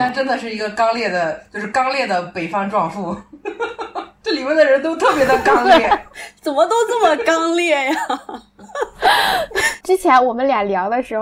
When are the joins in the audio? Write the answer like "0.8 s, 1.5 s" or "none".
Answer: 9.8 s